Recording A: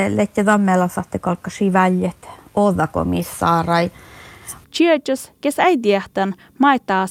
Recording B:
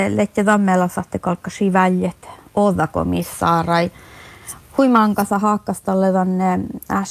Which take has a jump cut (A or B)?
A